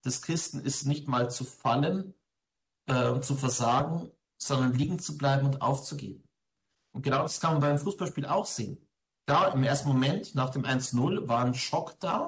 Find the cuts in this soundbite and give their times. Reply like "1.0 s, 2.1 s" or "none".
none